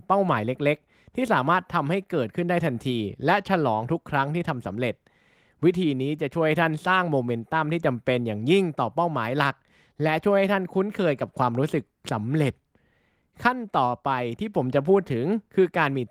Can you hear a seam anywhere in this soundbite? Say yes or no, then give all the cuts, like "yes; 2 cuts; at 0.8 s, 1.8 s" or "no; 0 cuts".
no; 0 cuts